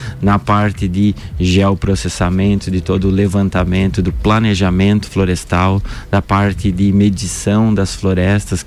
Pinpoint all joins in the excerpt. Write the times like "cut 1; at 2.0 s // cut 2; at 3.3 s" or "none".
none